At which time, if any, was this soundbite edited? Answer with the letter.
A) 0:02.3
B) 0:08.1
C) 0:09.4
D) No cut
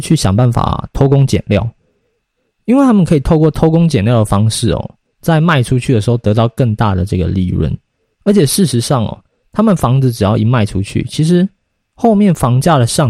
D